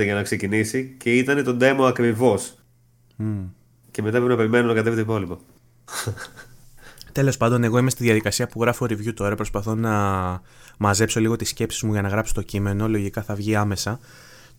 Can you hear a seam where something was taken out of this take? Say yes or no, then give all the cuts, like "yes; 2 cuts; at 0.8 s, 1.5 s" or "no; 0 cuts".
no; 0 cuts